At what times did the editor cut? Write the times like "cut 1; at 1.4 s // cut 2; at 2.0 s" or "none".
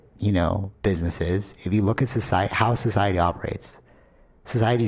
none